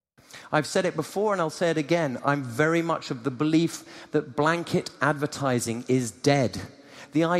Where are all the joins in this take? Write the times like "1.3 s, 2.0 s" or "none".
none